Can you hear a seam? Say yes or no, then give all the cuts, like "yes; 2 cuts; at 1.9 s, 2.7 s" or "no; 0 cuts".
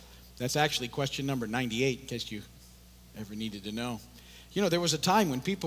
no; 0 cuts